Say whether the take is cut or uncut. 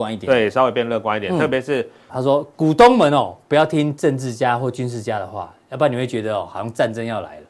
cut